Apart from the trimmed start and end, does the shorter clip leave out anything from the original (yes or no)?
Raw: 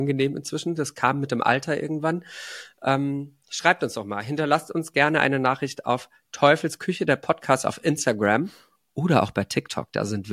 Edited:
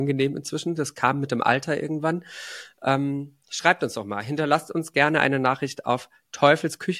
no